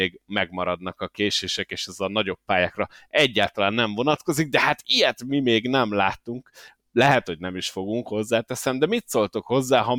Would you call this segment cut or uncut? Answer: uncut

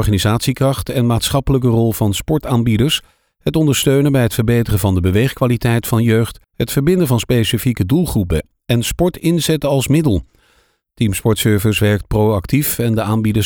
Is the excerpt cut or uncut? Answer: cut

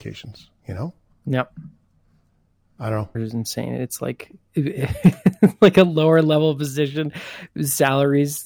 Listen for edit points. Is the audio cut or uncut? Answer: cut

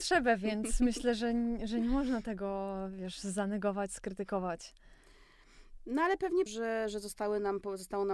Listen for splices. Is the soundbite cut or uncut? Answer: cut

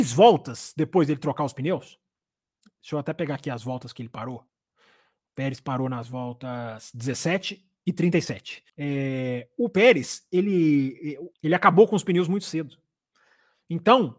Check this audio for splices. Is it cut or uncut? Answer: cut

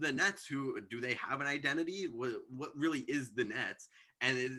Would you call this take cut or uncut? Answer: uncut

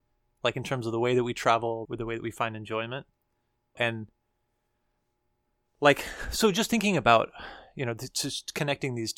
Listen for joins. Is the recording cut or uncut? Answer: cut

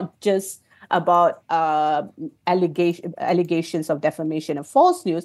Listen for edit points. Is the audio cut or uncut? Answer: uncut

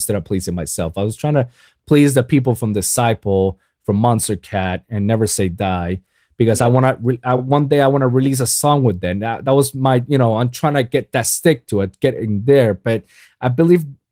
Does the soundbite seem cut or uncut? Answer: uncut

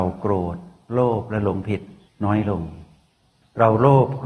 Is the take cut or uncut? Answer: uncut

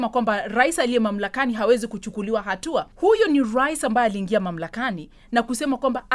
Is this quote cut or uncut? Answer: cut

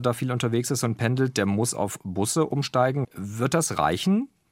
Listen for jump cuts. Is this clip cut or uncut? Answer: cut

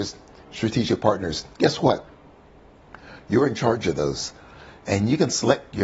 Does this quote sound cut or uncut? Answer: uncut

